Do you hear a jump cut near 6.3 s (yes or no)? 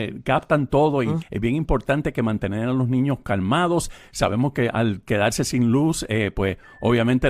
no